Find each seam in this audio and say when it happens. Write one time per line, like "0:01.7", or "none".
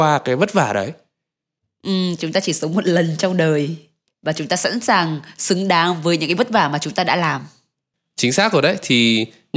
0:02.2